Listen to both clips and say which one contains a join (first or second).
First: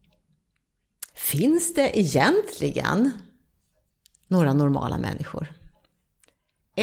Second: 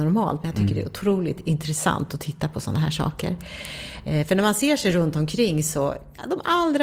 first